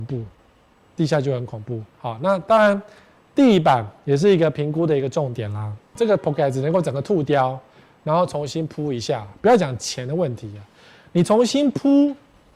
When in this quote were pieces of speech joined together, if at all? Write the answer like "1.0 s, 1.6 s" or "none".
1.9 s